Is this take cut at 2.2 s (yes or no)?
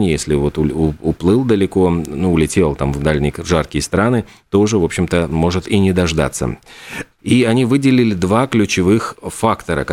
no